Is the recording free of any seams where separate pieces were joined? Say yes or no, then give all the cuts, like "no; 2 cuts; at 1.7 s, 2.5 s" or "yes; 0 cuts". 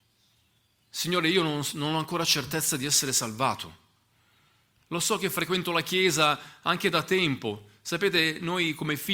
yes; 0 cuts